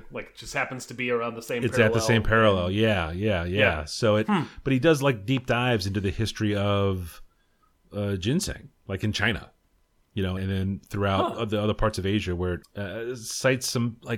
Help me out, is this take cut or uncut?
cut